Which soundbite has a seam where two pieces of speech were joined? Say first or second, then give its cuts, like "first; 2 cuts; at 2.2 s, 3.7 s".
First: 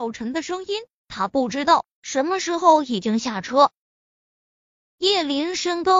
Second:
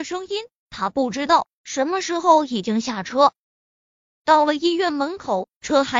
second; 1 cut; at 4.0 s